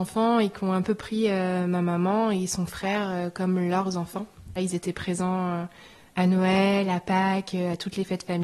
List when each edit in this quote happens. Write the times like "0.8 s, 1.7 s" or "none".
4.6 s